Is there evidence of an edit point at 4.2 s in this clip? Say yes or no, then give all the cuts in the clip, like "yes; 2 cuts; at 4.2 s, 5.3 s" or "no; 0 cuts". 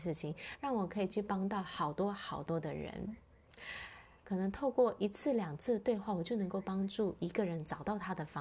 yes; 1 cut; at 4.2 s